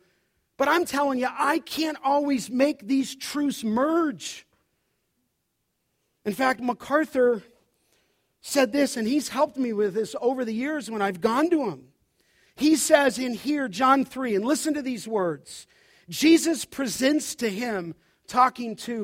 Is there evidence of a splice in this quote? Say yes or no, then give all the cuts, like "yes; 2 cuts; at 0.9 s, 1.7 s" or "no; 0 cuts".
no; 0 cuts